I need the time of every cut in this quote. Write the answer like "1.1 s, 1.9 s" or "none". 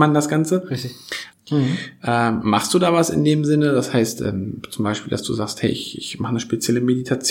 1.3 s